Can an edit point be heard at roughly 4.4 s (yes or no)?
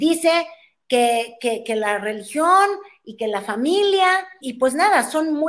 yes